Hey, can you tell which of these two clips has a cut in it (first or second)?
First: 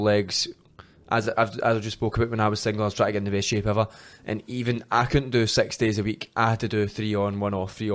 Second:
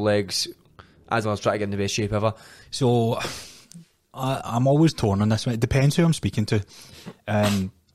second